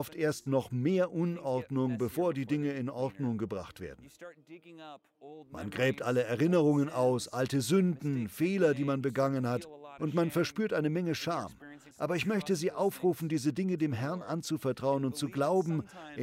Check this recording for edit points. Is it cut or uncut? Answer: cut